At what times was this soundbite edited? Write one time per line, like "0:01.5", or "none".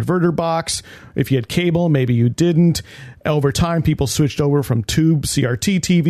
none